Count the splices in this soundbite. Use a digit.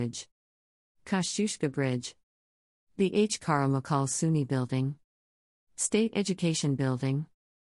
0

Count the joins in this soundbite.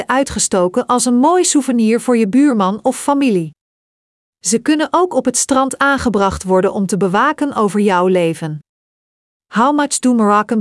0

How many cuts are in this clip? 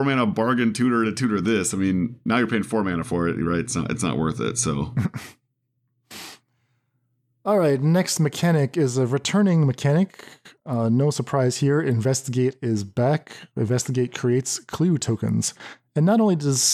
0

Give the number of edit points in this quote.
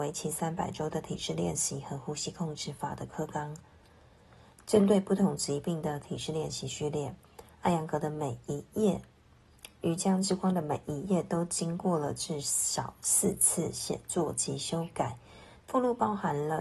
2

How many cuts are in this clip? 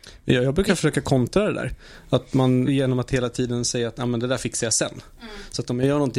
1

